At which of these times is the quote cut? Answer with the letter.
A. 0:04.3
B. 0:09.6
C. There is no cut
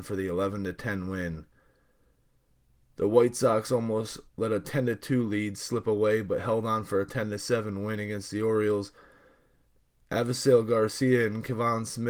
A